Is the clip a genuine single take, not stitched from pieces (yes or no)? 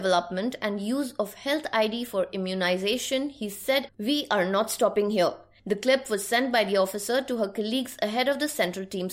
no